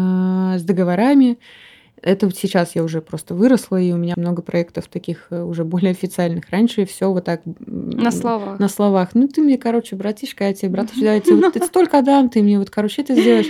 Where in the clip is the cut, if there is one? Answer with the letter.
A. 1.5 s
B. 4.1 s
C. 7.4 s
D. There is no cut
B